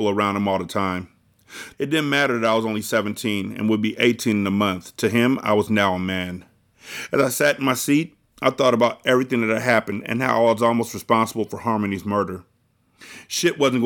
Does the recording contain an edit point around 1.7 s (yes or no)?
yes